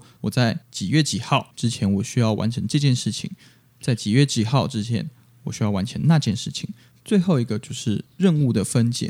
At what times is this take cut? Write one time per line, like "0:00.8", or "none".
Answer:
0:06.9